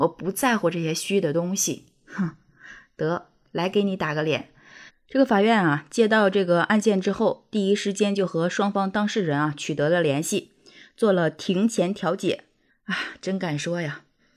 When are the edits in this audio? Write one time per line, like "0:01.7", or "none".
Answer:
0:04.9
0:12.7